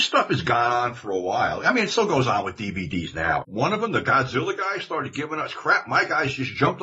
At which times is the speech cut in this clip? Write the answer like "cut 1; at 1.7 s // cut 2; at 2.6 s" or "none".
cut 1; at 3.4 s